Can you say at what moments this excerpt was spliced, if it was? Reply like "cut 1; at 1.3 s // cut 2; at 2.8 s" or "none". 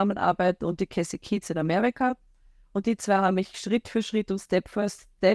cut 1; at 3.5 s